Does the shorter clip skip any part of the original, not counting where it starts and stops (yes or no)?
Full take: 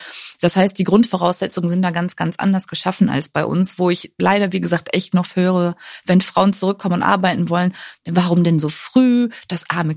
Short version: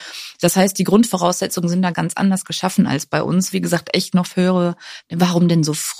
yes